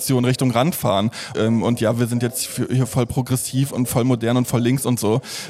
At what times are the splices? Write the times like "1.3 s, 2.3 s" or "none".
1.3 s, 3.7 s